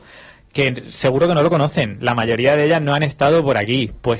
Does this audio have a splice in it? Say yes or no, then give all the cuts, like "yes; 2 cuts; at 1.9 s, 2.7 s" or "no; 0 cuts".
no; 0 cuts